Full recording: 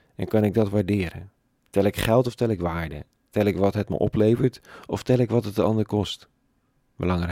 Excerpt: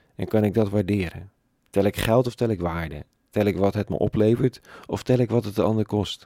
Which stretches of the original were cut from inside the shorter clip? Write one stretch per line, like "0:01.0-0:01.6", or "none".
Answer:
none